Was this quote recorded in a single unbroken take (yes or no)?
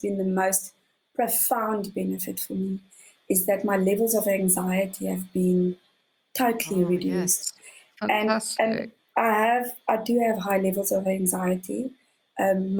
yes